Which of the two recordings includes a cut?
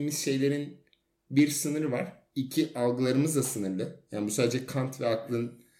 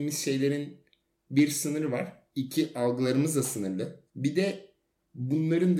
second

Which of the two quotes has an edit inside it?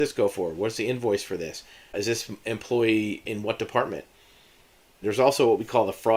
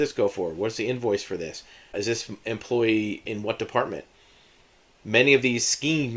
first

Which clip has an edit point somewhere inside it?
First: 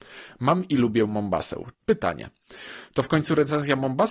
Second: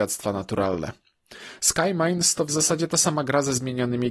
first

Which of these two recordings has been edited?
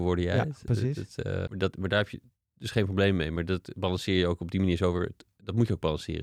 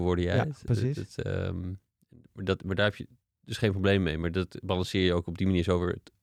first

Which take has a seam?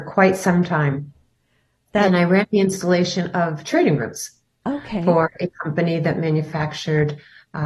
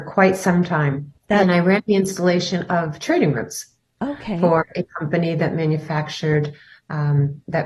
second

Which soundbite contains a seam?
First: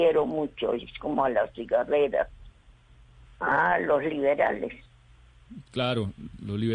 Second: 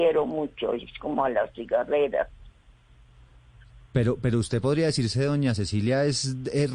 first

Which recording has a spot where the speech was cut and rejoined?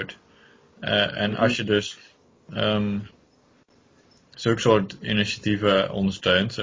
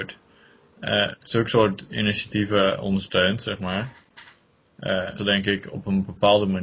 second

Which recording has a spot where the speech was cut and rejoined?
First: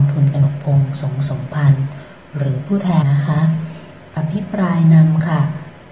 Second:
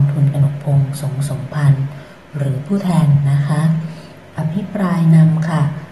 first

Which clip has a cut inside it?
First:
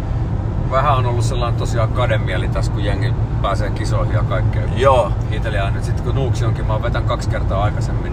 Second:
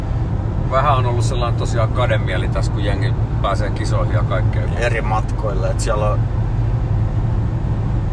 second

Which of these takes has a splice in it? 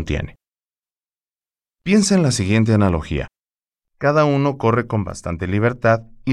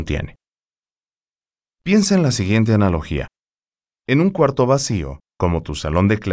first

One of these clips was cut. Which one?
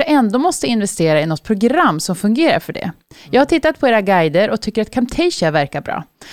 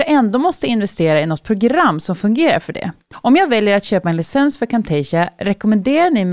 second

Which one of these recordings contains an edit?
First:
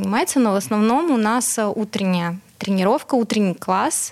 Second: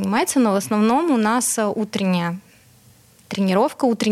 first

